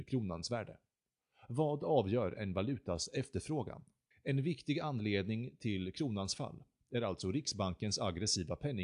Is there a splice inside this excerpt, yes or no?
yes